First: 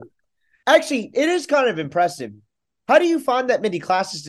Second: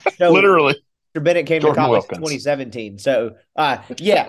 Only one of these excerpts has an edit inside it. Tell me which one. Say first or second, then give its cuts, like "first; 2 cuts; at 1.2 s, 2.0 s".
second; 1 cut; at 1.1 s